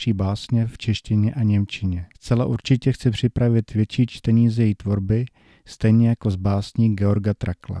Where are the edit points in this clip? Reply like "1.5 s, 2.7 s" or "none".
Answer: 2.1 s